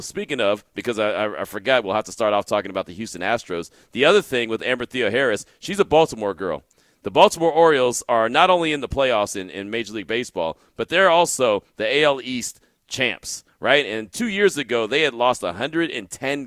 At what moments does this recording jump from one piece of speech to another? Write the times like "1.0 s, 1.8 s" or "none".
1.8 s